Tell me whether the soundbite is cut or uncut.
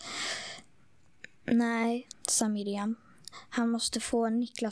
cut